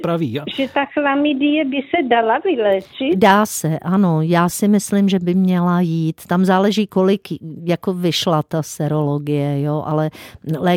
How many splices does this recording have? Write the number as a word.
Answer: zero